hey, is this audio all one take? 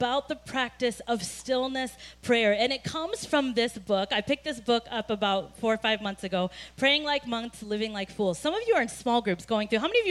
yes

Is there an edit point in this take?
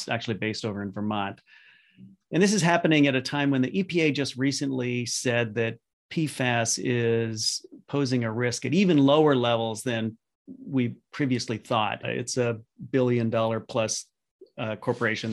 yes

